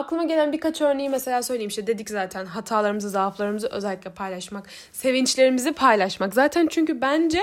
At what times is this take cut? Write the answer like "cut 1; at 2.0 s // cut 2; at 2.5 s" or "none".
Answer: none